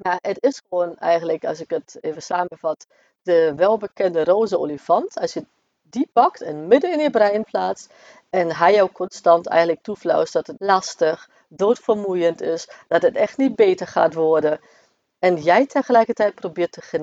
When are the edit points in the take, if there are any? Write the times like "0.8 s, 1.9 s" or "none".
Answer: 10.6 s